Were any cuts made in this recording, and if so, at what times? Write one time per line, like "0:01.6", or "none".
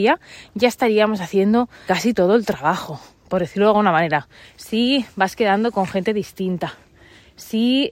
0:01.9
0:04.4